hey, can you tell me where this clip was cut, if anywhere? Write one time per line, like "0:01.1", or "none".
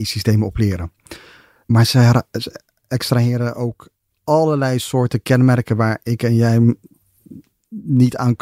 none